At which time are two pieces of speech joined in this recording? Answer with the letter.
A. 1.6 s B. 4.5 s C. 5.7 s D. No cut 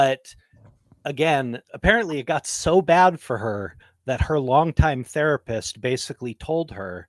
A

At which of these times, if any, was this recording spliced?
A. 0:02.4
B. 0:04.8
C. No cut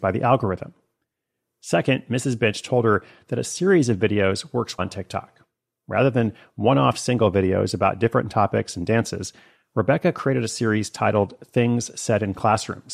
B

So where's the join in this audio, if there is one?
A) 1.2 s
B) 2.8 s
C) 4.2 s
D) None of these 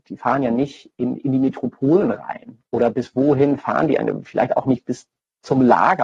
A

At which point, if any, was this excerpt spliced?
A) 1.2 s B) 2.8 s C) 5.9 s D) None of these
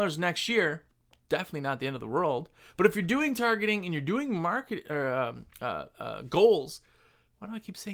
D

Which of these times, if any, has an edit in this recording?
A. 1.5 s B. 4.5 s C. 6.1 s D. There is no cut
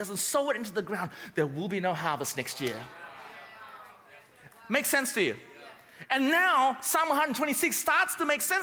B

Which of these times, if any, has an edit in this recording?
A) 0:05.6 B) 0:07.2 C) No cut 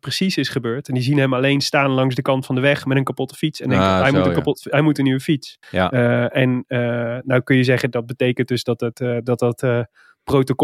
A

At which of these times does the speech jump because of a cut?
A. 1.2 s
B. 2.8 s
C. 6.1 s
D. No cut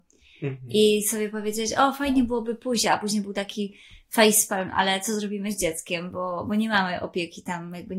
B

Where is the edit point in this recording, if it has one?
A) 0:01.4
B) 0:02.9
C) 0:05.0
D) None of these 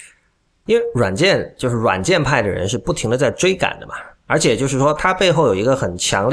C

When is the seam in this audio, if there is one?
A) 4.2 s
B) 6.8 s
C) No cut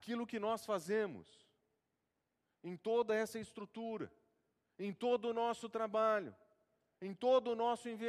C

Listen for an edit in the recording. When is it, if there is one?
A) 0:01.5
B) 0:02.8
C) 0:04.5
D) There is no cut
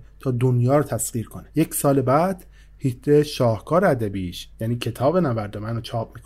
A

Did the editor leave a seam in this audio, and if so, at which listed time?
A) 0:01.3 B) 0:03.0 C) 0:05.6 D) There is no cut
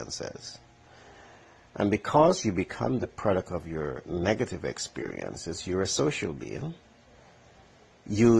D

